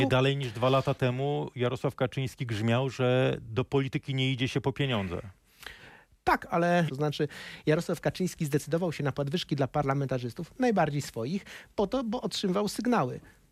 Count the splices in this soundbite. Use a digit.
1